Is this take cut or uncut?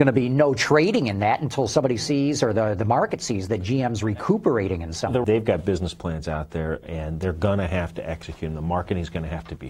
cut